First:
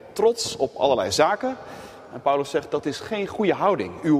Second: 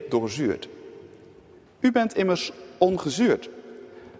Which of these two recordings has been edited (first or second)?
second